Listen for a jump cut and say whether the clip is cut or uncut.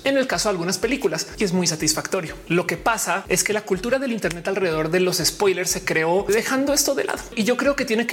uncut